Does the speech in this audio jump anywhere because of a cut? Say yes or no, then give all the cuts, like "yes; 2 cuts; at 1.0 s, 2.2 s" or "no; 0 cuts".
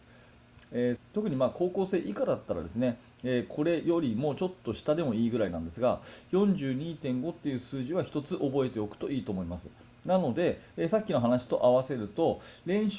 yes; 1 cut; at 1.0 s